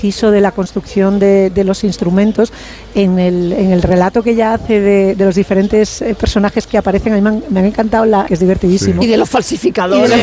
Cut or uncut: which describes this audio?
cut